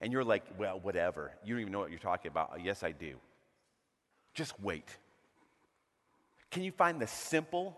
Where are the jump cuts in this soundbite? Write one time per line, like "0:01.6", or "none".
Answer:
none